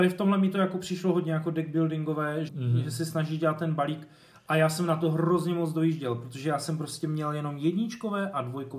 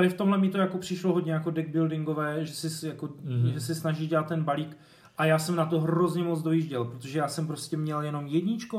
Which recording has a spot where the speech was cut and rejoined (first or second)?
first